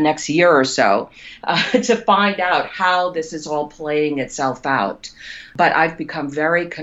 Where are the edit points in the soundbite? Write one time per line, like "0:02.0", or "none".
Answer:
none